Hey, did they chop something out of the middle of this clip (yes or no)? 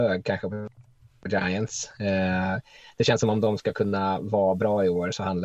no